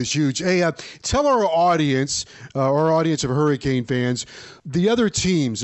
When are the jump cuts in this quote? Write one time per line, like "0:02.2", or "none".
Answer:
0:04.6

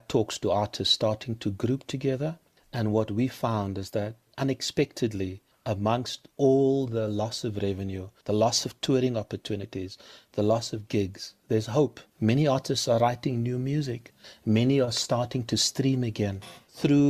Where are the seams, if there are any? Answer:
none

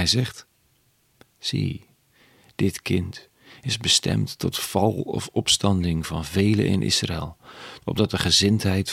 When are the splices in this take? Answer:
0:07.8

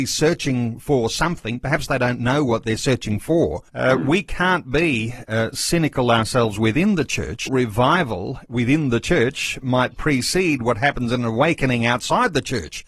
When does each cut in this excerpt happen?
0:03.7
0:07.5

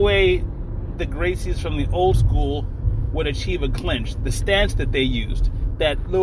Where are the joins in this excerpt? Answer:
none

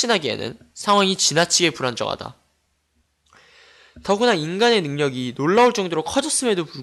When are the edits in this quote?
none

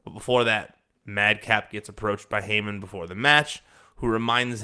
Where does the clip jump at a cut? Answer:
none

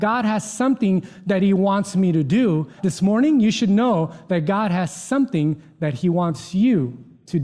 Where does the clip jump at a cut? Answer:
0:02.8

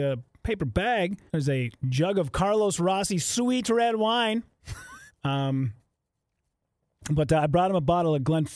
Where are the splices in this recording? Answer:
0:01.3
0:05.1

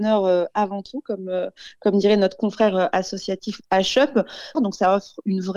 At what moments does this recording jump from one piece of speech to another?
0:04.5

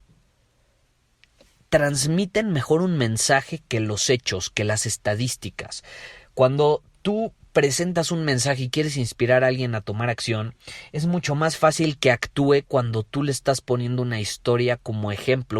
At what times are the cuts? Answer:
none

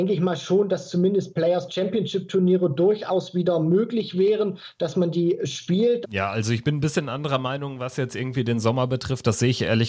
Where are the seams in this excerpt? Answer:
0:06.0

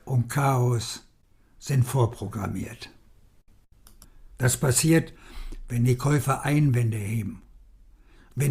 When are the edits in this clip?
0:04.3

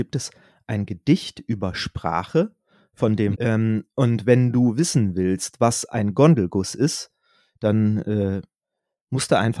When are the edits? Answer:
0:03.3

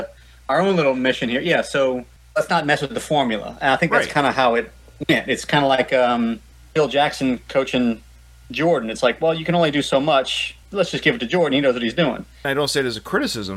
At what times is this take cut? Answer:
none

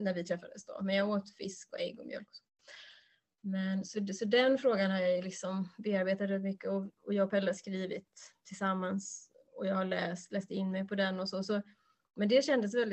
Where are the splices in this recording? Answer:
none

